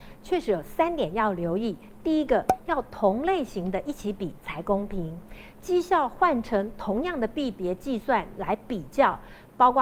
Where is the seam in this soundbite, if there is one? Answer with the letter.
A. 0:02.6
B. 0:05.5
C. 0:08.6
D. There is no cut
B